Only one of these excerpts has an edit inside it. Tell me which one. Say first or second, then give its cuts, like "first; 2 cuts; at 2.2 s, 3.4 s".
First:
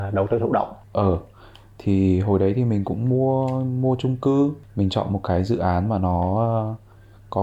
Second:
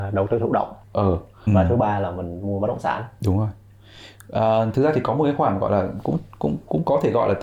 second; 1 cut; at 1.5 s